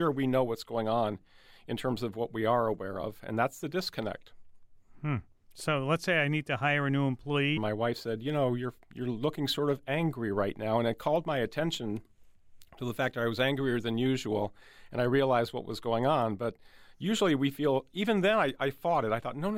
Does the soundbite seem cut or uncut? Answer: cut